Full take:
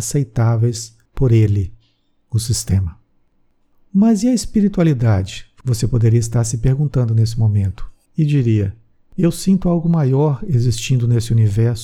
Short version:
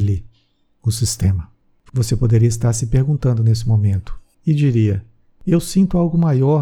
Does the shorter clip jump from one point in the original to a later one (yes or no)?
yes